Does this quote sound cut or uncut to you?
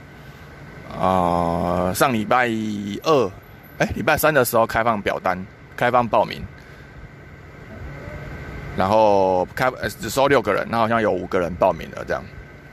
uncut